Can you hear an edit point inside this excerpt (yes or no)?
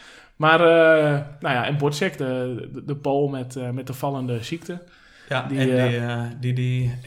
no